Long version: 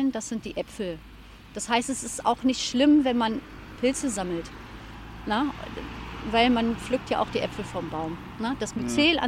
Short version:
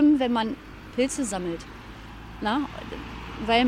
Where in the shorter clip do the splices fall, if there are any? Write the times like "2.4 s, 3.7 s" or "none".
none